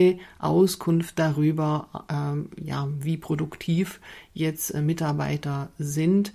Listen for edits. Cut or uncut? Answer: uncut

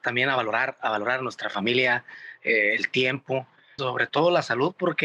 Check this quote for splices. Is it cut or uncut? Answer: cut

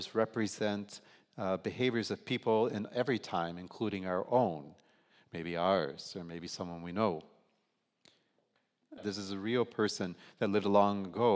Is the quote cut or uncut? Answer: cut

